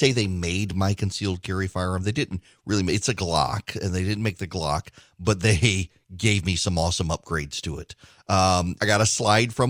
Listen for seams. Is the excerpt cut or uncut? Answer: cut